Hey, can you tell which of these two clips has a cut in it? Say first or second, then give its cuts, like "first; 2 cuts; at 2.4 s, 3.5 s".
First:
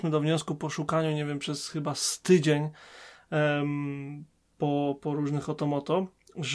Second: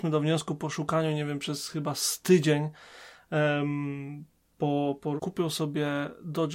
second; 1 cut; at 5.2 s